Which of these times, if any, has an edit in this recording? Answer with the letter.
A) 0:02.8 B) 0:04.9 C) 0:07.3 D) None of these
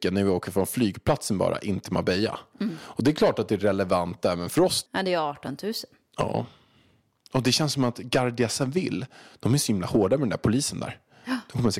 B